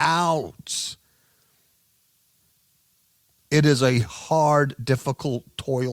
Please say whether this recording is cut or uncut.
uncut